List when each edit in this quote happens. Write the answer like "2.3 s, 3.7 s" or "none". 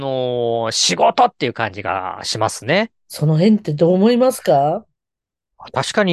3.1 s